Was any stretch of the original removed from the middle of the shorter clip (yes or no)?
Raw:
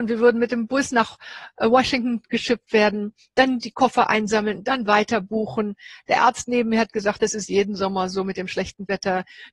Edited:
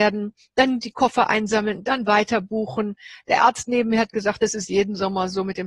no